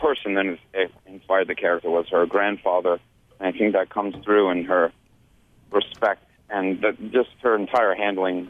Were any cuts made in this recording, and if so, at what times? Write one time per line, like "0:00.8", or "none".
none